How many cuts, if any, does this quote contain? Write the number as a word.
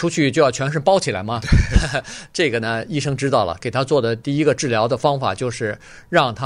one